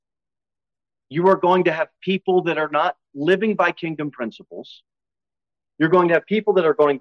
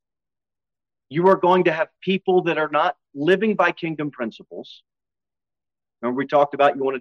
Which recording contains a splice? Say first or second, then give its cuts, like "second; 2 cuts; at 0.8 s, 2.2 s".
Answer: first; 1 cut; at 5.7 s